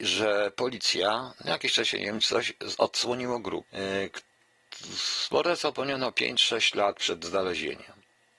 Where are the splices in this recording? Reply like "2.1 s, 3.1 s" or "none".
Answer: 3.6 s